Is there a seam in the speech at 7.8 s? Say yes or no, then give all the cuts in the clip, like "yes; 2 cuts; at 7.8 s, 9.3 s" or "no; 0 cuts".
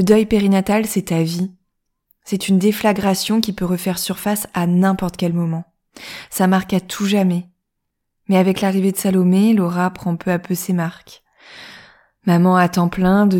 no; 0 cuts